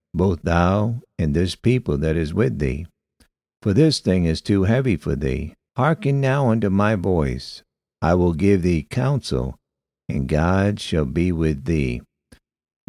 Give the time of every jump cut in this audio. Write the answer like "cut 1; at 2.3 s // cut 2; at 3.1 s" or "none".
cut 1; at 5.7 s